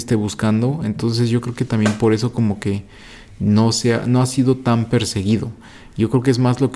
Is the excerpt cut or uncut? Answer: uncut